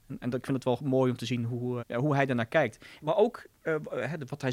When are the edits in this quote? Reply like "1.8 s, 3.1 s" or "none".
1.8 s, 3.0 s